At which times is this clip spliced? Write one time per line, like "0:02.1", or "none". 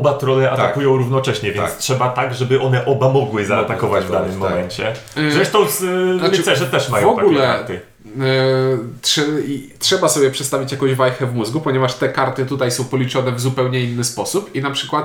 none